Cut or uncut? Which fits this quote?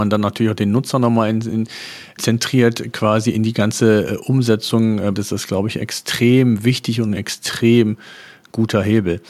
cut